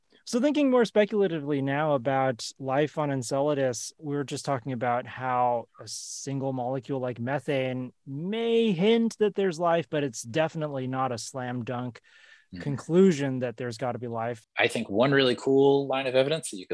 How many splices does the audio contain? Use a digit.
1